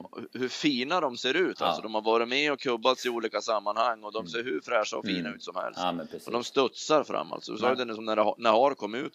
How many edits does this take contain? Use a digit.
0